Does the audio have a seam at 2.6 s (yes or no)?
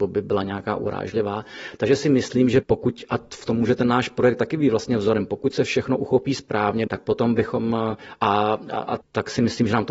yes